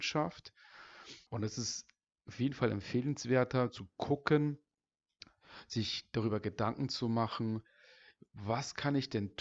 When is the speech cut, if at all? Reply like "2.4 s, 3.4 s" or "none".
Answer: 1.3 s